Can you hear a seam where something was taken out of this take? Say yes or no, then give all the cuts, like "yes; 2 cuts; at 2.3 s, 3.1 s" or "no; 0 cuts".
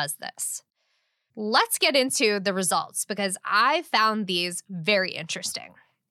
no; 0 cuts